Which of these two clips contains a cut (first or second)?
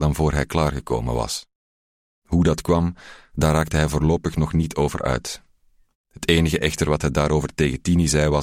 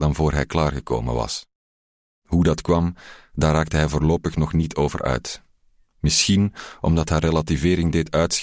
first